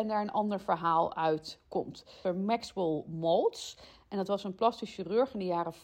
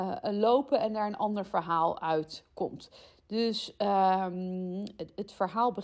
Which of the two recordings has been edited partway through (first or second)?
first